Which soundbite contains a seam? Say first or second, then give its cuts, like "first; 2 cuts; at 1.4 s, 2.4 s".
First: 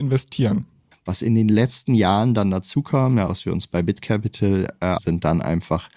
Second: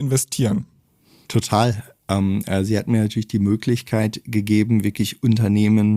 first; 3 cuts; at 0.9 s, 3.3 s, 5.0 s